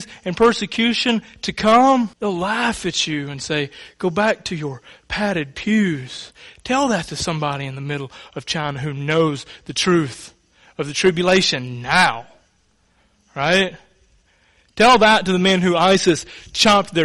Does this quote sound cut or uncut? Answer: cut